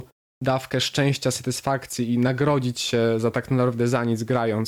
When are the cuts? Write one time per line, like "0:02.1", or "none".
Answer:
none